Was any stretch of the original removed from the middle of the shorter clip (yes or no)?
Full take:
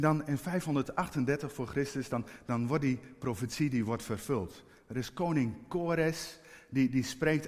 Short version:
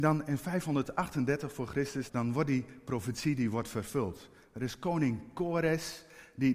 yes